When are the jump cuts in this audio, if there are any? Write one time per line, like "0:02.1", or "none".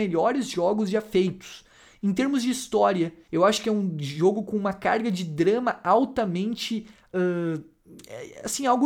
0:03.3